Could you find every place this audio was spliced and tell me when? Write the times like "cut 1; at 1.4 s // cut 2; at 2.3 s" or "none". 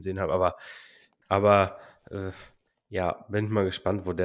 cut 1; at 1.2 s